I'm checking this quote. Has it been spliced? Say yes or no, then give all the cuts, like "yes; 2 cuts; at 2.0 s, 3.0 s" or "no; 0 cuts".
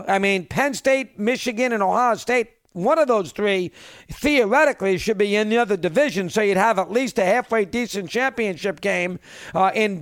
no; 0 cuts